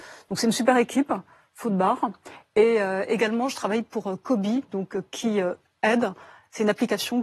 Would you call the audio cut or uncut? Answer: uncut